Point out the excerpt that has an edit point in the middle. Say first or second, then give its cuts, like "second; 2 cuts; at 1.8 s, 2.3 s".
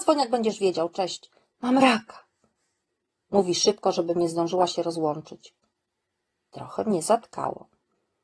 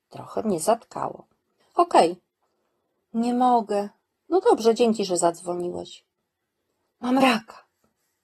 second; 3 cuts; at 1.6 s, 4.1 s, 6.9 s